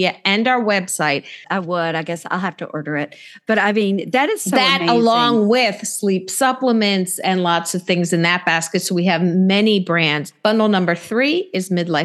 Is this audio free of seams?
no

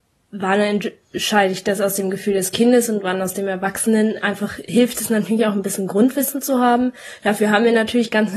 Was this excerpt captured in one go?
yes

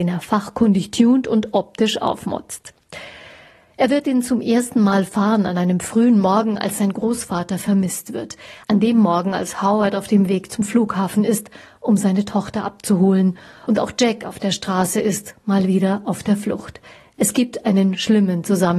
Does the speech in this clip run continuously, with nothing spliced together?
yes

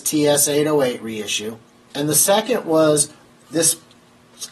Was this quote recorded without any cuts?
no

